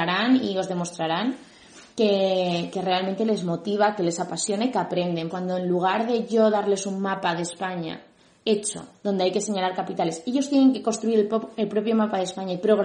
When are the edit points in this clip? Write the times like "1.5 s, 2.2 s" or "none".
5.3 s